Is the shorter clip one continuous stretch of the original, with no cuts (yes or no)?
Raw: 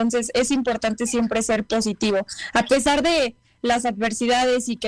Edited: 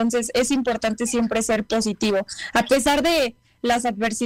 yes